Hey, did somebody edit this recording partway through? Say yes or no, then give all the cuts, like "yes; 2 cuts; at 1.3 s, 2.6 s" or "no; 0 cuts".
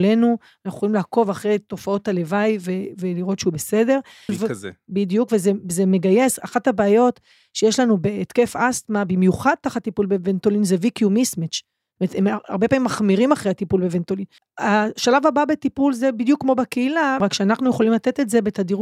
yes; 3 cuts; at 4.3 s, 14.4 s, 17.2 s